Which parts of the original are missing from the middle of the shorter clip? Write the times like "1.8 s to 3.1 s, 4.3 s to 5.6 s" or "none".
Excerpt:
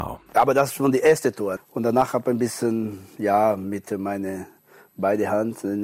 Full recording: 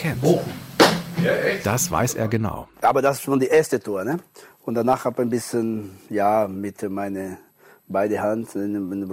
4.0 s to 4.5 s